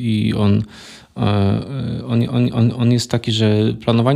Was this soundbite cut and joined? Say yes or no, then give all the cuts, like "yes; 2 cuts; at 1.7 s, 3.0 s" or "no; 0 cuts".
no; 0 cuts